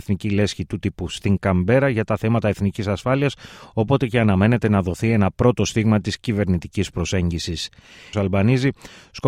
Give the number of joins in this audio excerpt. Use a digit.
1